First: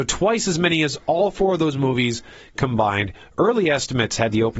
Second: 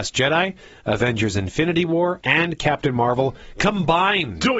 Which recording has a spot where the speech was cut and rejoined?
second; 1 cut; at 2.2 s

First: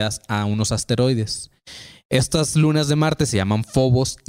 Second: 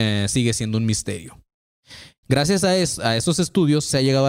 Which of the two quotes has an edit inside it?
second; 1 cut; at 2.2 s

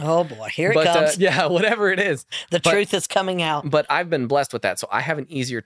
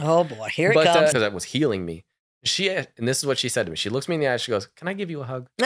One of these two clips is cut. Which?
second; 1 cut; at 1.1 s

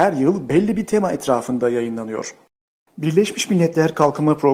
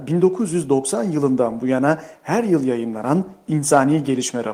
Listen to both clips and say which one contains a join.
first; 1 cut; at 2.9 s

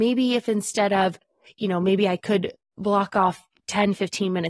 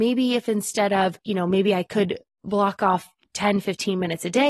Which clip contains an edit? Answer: second; 1 cut; at 1.2 s

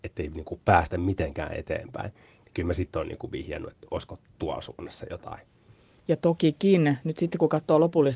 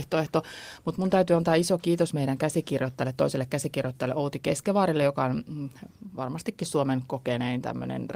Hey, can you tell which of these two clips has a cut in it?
first; 1 cut; at 6.0 s

